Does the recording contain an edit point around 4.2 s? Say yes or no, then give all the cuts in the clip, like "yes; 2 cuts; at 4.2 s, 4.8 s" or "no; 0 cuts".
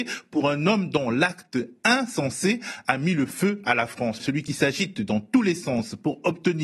yes; 1 cut; at 4.2 s